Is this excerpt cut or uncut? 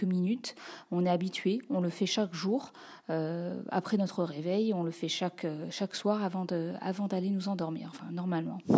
uncut